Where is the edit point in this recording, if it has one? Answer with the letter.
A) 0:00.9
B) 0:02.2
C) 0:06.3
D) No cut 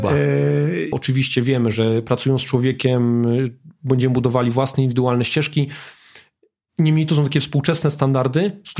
A